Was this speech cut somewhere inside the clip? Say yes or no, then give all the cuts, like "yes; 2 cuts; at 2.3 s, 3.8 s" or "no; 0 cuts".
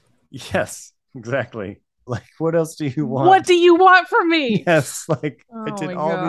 yes; 1 cut; at 2.1 s